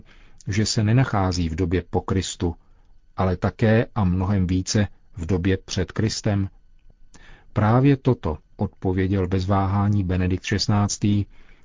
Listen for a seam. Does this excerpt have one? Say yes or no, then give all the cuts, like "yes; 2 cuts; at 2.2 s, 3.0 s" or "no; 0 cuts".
yes; 1 cut; at 8.4 s